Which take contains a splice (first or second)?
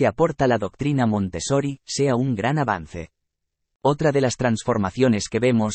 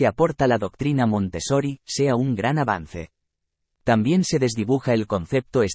second